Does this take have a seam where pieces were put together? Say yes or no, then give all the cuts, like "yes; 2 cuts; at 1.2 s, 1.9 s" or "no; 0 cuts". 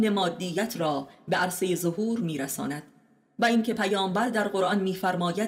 no; 0 cuts